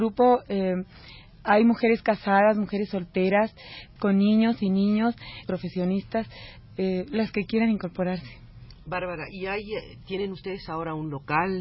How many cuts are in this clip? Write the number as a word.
two